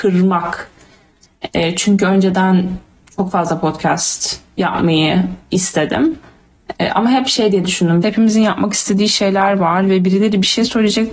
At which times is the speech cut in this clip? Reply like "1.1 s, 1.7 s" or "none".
8.0 s